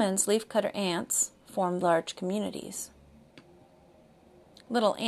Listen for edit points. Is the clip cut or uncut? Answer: cut